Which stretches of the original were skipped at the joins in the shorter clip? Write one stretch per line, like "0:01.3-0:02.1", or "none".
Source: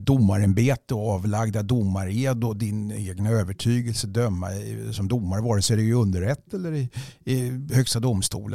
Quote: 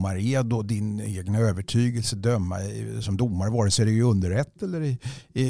none